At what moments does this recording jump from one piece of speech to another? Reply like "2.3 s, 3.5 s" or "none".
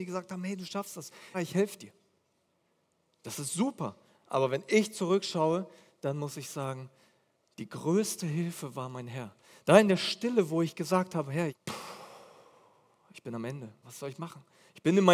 1.3 s, 11.5 s, 13.8 s